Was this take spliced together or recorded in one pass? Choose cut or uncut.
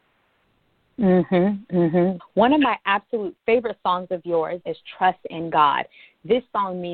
cut